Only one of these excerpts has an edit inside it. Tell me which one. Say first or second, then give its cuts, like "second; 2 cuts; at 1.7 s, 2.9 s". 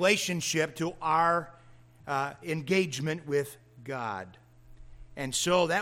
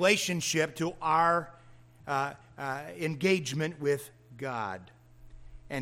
first; 1 cut; at 2.4 s